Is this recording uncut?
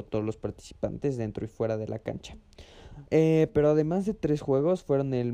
no; 1 cut; at 3.1 s

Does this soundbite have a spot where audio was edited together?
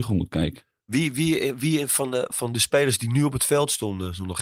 no; 0 cuts

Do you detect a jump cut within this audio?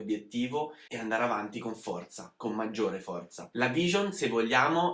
no; 0 cuts

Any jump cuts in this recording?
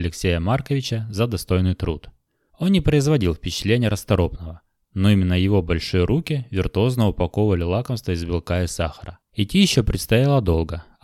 yes; 2 cuts; at 2.5 s, 9.3 s

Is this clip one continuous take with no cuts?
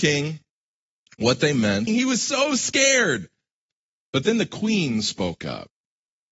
no; 2 cuts; at 1.9 s, 4.0 s

